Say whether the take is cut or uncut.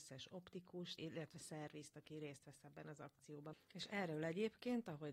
cut